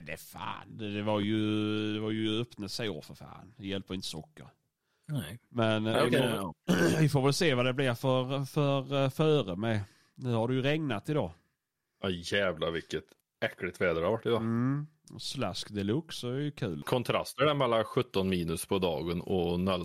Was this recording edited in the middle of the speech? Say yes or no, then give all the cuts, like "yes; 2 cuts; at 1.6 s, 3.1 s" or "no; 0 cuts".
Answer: no; 0 cuts